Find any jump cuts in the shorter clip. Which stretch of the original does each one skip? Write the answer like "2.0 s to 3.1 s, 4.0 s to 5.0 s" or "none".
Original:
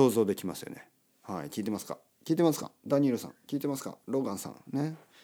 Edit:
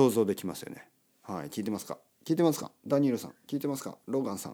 none